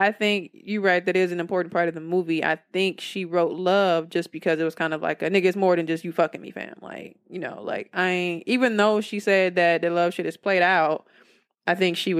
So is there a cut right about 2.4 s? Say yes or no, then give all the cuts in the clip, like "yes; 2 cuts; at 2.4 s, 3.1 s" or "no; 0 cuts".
no; 0 cuts